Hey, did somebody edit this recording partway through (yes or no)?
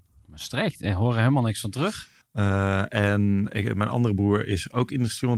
yes